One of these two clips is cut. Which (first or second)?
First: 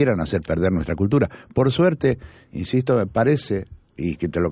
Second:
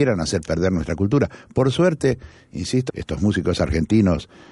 second